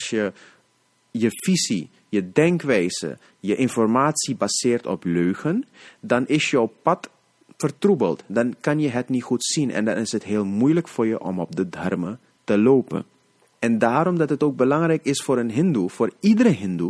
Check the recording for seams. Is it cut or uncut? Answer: cut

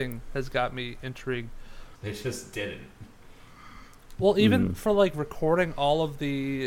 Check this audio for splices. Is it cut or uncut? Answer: cut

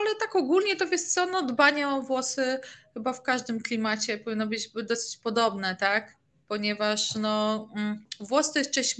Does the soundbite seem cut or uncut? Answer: uncut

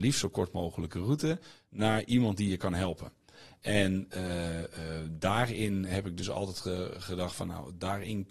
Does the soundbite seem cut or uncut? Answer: uncut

